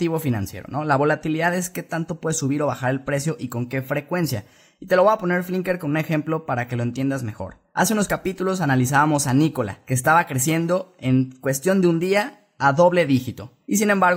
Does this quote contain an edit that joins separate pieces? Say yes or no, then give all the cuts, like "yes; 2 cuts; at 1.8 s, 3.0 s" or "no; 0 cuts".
no; 0 cuts